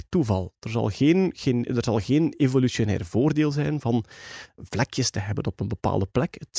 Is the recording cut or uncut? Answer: uncut